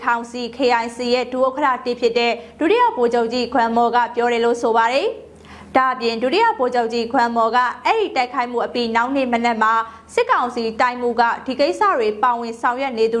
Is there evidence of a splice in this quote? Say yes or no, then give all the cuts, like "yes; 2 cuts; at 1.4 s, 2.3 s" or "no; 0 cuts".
no; 0 cuts